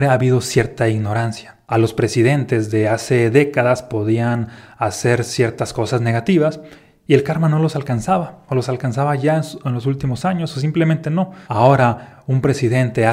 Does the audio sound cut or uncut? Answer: cut